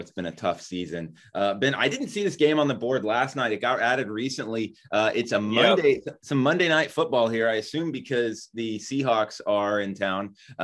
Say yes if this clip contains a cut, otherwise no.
no